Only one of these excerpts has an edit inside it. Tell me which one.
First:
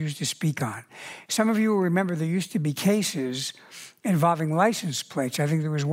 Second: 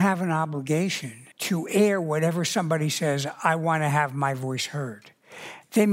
second; 1 cut; at 1.3 s

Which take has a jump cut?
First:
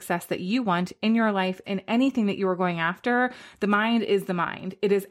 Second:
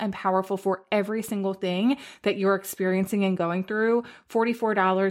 first; 1 cut; at 1.6 s

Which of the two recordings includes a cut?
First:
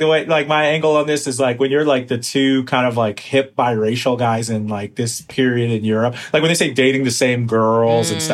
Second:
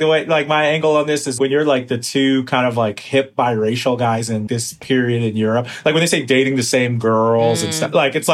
second; 2 cuts; at 1.4 s, 4.5 s

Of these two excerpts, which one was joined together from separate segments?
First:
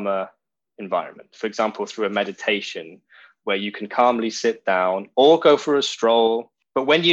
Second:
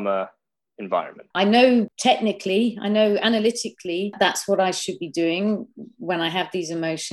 second; 1 cut; at 1.3 s

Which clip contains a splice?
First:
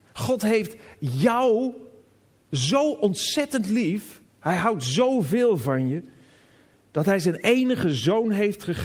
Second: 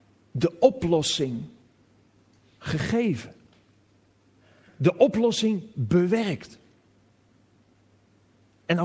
first; 1 cut; at 4.3 s

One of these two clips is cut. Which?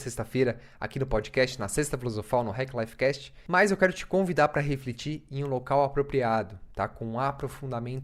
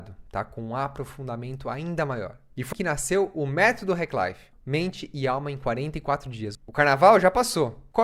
second; 3 cuts; at 2.7 s, 4.5 s, 6.5 s

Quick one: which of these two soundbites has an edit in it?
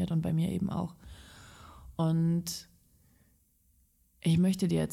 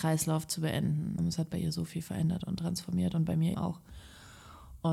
second; 2 cuts; at 1.2 s, 3.5 s

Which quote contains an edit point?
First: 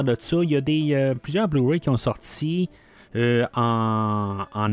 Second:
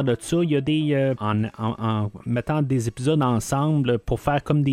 second; 1 cut; at 1.2 s

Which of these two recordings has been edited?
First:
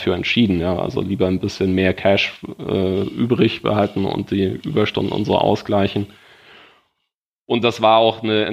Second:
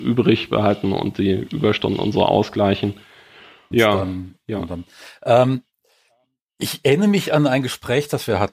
second; 1 cut; at 3.7 s

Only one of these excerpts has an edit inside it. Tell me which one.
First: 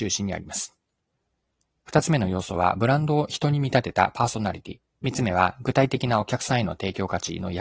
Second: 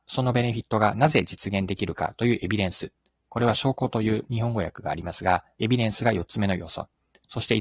first; 1 cut; at 4.9 s

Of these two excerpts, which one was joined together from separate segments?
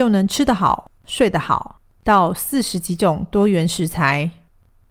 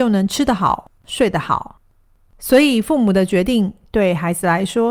first; 1 cut; at 2.0 s

